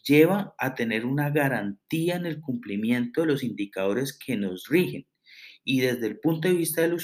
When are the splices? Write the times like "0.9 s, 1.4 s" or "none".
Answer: none